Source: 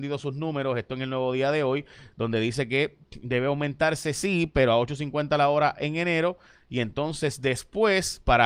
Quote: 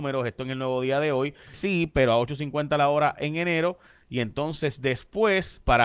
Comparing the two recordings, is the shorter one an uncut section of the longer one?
no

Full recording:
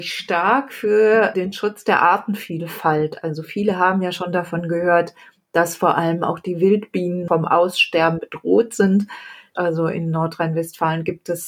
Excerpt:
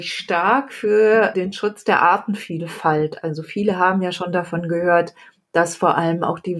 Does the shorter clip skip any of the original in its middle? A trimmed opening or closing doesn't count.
no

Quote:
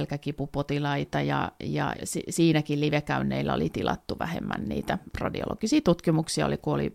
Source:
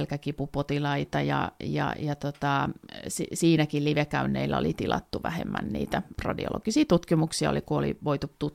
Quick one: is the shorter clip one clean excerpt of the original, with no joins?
no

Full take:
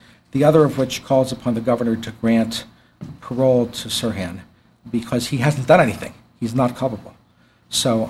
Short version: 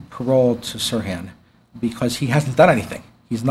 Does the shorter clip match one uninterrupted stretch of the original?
yes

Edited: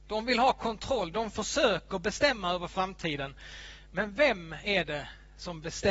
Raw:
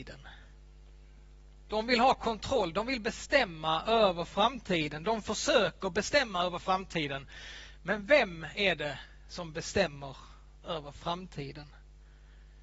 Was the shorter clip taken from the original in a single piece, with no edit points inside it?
no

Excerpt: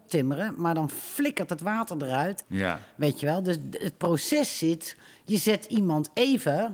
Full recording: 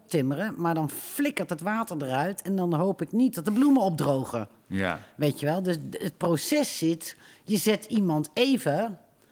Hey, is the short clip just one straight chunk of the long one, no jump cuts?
no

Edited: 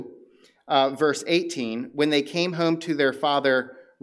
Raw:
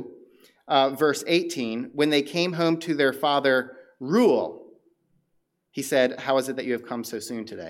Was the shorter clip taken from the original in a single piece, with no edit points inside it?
yes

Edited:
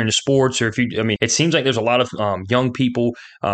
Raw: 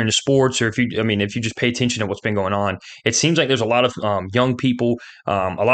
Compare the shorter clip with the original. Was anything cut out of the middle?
yes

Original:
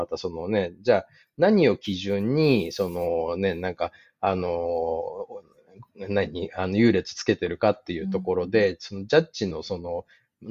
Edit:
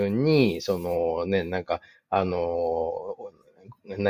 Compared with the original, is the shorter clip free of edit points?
yes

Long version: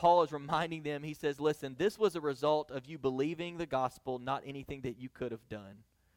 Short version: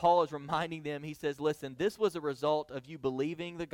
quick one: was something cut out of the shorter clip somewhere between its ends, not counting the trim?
no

